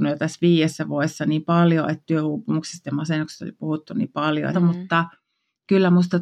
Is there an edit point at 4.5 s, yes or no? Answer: yes